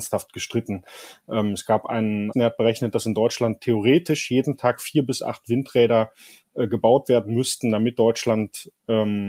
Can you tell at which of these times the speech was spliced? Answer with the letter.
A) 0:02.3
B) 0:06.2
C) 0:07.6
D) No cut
A